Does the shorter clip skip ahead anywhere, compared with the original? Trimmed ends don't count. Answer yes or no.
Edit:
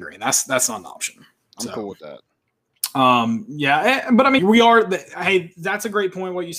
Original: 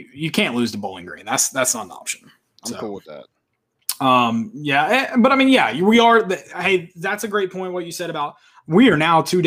yes